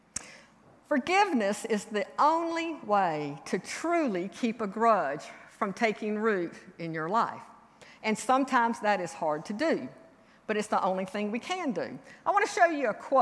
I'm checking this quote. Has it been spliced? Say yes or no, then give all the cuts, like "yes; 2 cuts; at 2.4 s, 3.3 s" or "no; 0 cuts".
no; 0 cuts